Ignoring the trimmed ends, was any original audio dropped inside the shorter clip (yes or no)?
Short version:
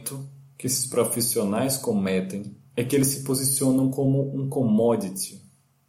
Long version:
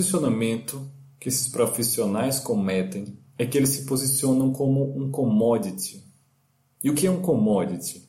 no